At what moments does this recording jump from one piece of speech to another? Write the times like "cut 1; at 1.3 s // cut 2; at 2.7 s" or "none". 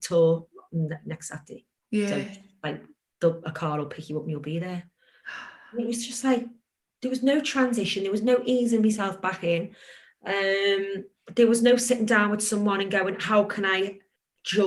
none